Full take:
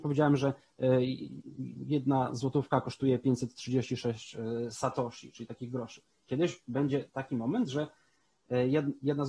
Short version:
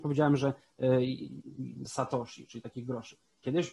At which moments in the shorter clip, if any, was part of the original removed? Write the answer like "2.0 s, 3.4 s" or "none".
1.9 s